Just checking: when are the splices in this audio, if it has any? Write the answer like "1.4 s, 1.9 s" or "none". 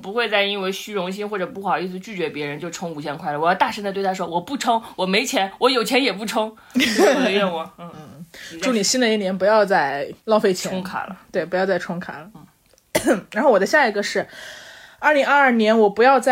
10.2 s